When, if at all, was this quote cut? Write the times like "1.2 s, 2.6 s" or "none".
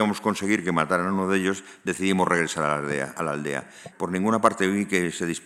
3.9 s